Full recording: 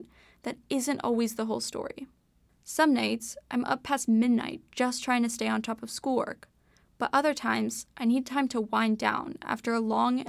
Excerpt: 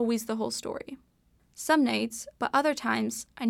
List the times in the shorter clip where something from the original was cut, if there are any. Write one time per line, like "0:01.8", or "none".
0:02.4